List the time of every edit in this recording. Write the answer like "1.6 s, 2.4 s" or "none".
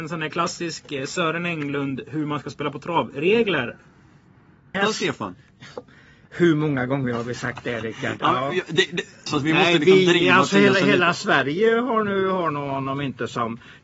4.7 s, 9.3 s